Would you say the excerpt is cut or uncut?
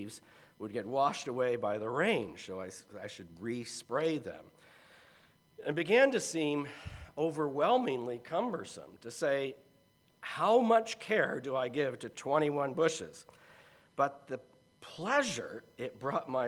uncut